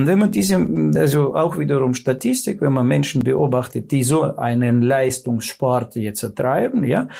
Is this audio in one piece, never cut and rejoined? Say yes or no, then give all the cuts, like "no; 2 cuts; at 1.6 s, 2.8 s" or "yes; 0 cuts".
yes; 0 cuts